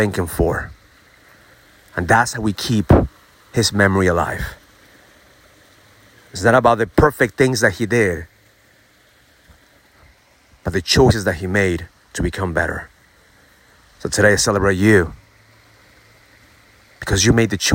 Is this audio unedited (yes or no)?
yes